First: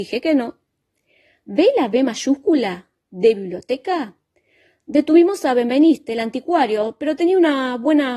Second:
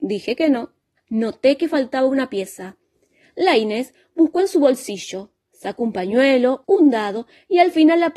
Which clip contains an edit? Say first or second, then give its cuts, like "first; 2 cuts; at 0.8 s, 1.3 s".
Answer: second; 2 cuts; at 1.0 s, 6.6 s